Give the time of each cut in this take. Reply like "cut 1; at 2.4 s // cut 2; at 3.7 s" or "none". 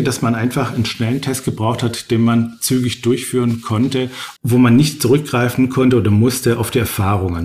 cut 1; at 4.4 s